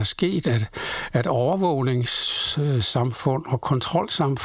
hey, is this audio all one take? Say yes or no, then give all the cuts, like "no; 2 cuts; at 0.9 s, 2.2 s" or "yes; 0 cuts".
yes; 0 cuts